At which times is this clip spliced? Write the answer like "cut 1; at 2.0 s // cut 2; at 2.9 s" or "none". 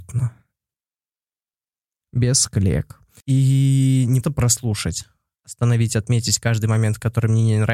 cut 1; at 3.2 s // cut 2; at 4.2 s